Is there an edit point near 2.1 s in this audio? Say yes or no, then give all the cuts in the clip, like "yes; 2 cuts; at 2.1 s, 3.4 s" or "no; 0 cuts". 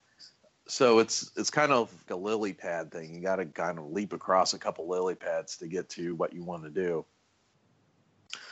yes; 1 cut; at 2.1 s